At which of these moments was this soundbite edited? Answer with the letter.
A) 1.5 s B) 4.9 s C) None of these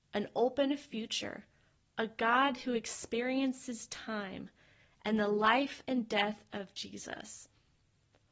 C